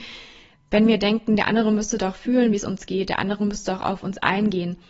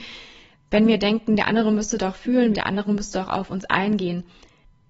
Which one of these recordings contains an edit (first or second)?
second